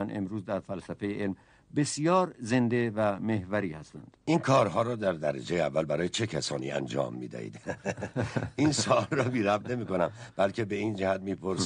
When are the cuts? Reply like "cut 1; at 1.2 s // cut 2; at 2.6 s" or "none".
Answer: cut 1; at 4.2 s

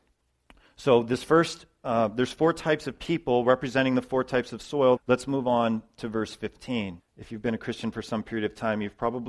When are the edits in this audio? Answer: cut 1; at 5.0 s // cut 2; at 7.0 s

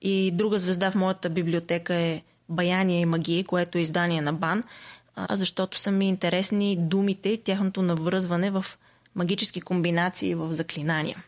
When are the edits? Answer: cut 1; at 5.3 s

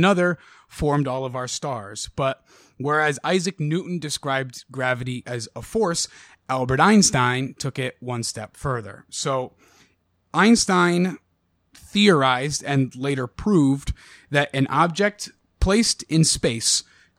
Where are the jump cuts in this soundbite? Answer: none

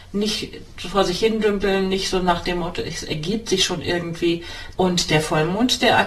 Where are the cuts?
cut 1; at 4.8 s

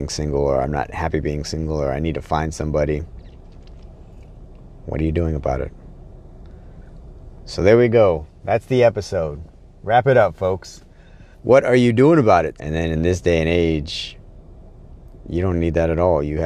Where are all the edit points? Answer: cut 1; at 11.3 s // cut 2; at 12.6 s

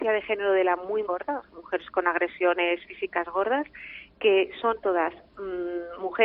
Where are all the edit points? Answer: cut 1; at 1.1 s

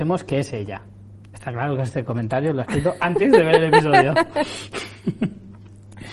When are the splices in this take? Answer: cut 1; at 1.2 s

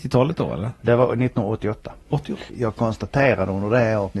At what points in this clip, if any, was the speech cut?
cut 1; at 2.5 s

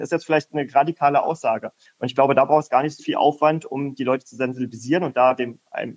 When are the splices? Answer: cut 1; at 1.9 s // cut 2; at 3.0 s

